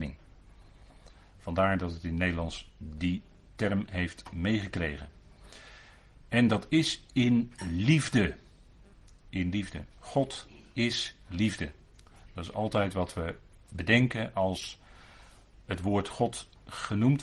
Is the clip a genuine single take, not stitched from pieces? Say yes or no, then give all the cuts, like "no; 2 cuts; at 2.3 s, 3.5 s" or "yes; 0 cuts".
no; 1 cut; at 9.9 s